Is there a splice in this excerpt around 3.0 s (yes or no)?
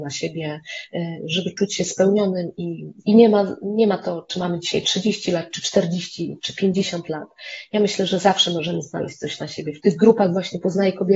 yes